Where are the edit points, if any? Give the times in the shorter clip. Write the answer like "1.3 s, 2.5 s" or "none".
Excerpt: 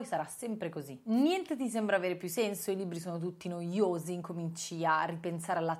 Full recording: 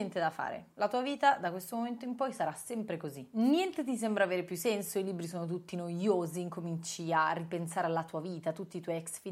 none